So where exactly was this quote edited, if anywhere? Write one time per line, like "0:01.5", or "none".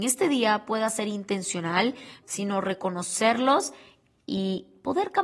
0:02.2

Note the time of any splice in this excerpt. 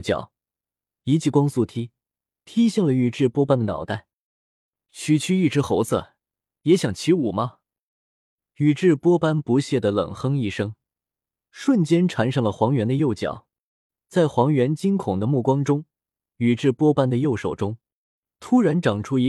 0:11.4
0:13.9

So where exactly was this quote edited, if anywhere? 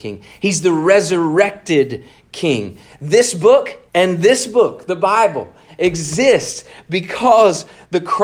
0:03.9

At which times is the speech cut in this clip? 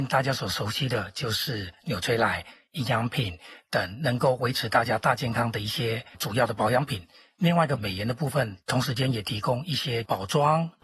none

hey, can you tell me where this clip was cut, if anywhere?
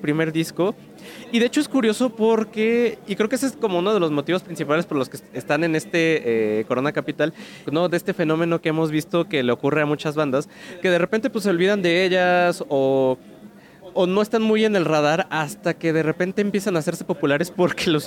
0:07.7

